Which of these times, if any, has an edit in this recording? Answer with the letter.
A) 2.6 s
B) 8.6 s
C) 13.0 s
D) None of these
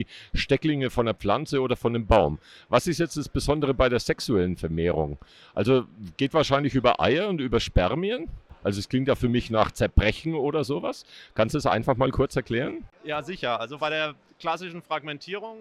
B